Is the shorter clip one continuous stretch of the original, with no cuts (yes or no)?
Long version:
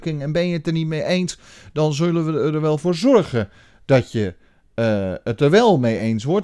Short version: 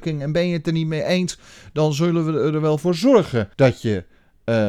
no